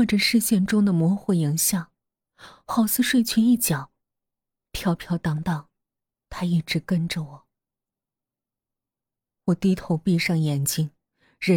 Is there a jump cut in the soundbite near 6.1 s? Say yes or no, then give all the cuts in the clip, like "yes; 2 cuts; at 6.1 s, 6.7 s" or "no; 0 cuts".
yes; 2 cuts; at 6.1 s, 9.4 s